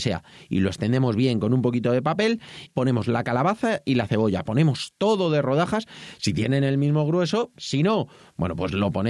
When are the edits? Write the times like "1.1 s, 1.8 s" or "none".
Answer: 2.7 s, 7.6 s